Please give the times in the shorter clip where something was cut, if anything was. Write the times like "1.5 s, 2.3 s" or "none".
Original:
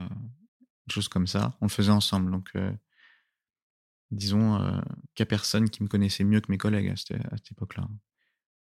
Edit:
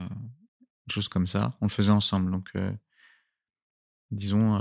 none